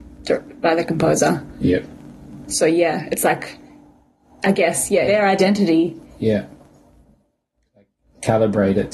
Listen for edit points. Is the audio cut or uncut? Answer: cut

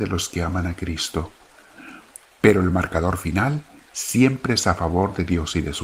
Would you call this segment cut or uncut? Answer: cut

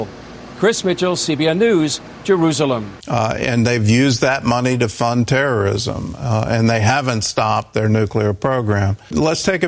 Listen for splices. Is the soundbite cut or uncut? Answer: cut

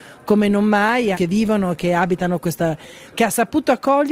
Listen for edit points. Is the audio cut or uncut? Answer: cut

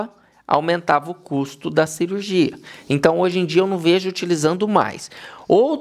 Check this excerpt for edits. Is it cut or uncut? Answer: uncut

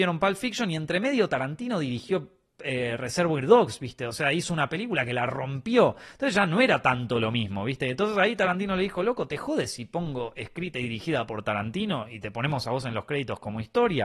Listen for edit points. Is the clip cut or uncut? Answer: uncut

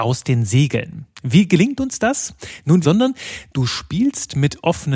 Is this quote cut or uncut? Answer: cut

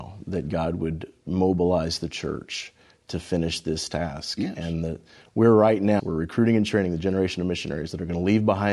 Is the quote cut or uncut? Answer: cut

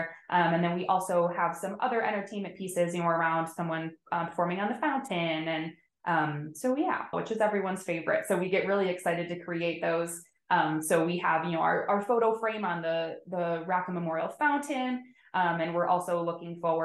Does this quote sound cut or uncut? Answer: cut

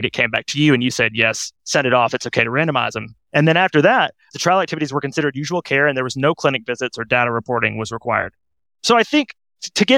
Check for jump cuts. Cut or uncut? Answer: cut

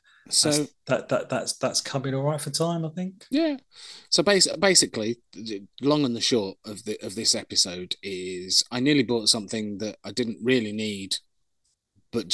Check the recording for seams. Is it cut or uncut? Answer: uncut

